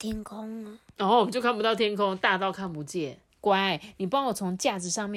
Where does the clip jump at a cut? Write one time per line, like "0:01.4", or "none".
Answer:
0:03.3